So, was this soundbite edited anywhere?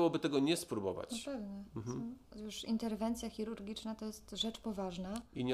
no; 0 cuts

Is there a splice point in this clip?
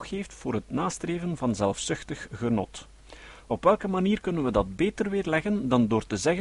no; 0 cuts

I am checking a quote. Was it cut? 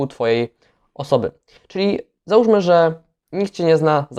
yes; 1 cut; at 1.6 s

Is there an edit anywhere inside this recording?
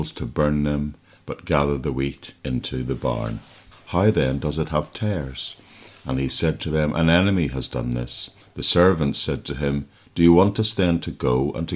yes; 1 cut; at 3.7 s

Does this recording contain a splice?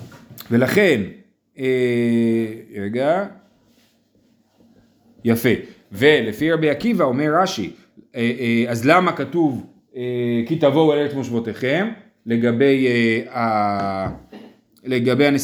no; 0 cuts

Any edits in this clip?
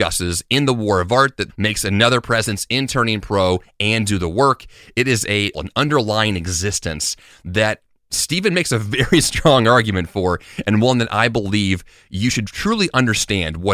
yes; 2 cuts; at 1.5 s, 5.5 s

